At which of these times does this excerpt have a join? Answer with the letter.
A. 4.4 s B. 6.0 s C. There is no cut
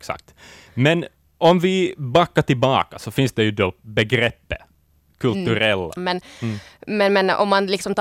B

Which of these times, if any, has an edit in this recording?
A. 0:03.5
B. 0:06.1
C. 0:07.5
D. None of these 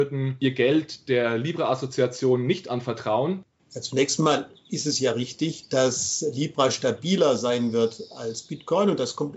A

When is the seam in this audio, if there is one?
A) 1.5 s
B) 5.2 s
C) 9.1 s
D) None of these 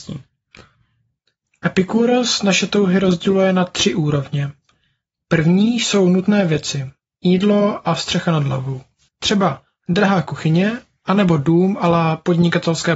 C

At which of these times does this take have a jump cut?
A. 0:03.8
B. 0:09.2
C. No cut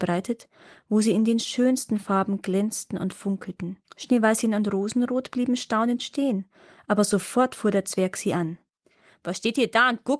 A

